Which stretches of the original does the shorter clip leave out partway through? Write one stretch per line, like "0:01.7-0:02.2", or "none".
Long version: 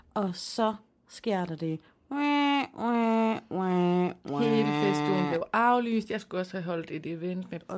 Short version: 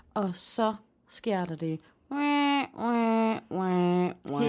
none